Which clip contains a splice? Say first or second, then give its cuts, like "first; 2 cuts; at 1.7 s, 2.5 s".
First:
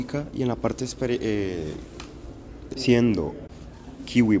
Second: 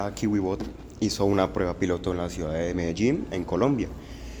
first; 1 cut; at 2.7 s